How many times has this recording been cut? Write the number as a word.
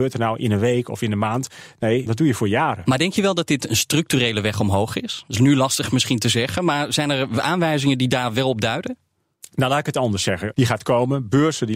two